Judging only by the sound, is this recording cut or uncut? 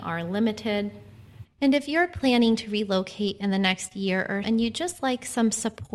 cut